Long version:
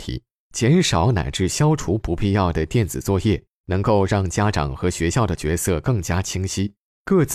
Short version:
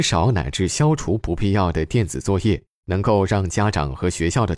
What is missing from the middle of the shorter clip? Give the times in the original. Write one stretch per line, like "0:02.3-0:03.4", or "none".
none